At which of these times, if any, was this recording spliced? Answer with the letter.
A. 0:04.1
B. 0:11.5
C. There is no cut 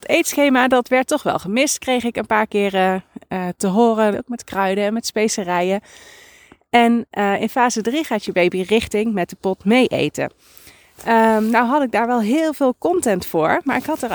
A